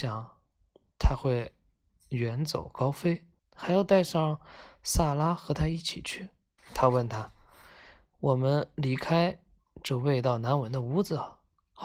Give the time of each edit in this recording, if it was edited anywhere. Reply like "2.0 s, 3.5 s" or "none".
3.4 s, 6.6 s